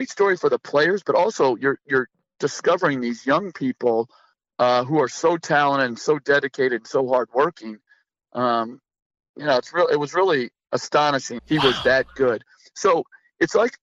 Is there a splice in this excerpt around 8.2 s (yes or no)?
no